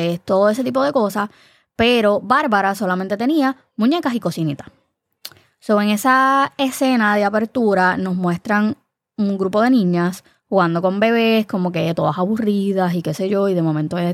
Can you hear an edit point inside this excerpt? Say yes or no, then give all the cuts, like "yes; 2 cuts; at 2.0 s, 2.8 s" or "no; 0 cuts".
no; 0 cuts